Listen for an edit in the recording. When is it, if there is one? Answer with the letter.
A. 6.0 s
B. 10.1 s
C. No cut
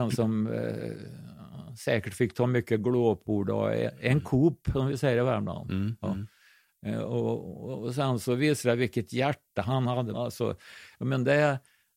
B